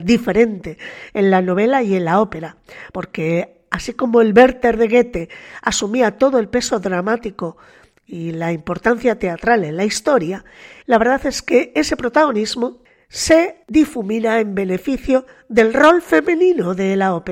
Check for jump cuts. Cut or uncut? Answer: cut